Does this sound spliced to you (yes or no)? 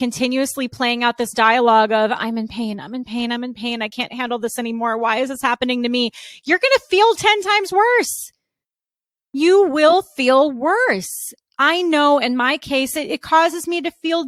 no